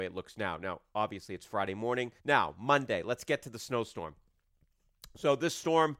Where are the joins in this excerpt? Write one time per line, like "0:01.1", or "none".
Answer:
0:02.2